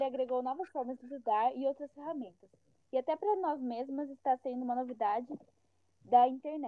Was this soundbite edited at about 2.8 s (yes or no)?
no